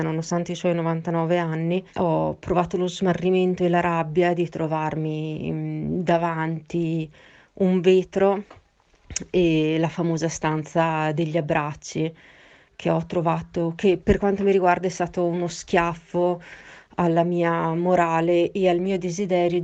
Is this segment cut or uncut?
cut